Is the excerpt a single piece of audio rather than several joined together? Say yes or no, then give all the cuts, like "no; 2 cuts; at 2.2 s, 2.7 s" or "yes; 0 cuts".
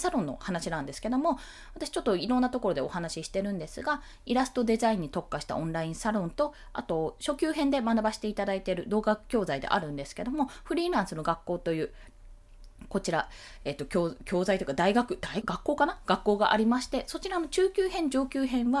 no; 1 cut; at 15.4 s